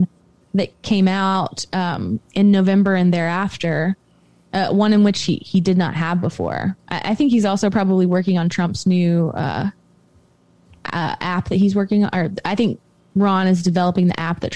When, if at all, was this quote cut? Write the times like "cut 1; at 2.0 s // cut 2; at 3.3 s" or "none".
none